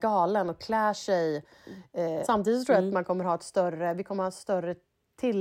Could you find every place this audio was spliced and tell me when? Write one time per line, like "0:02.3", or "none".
0:02.2